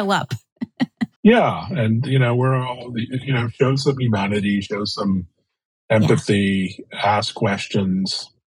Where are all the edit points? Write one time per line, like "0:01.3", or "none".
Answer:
none